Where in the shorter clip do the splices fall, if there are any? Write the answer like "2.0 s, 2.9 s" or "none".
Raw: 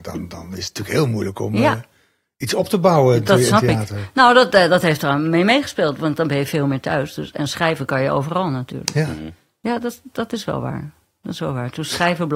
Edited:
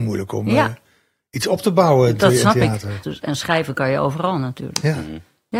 3.0 s